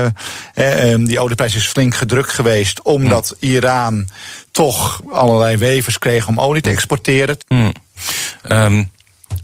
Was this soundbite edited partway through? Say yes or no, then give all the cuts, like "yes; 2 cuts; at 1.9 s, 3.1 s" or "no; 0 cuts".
yes; 1 cut; at 7.4 s